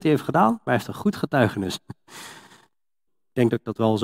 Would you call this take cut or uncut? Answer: cut